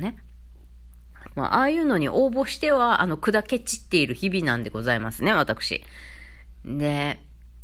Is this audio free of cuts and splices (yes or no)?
no